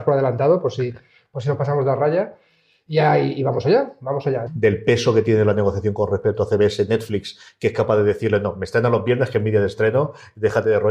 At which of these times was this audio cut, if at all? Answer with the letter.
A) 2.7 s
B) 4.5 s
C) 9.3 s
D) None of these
B